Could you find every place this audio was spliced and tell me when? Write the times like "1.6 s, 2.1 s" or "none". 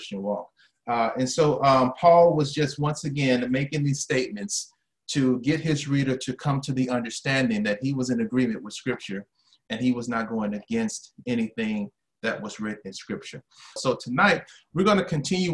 13.8 s